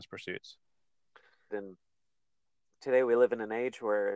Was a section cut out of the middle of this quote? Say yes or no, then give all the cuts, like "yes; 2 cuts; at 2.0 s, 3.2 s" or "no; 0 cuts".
yes; 1 cut; at 1.5 s